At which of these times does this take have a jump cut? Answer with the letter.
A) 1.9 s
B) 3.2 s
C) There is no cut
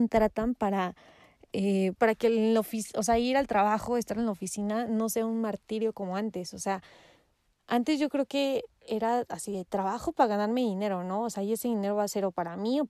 A